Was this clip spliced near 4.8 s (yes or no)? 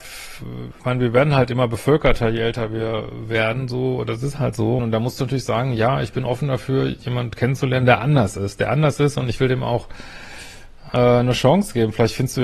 yes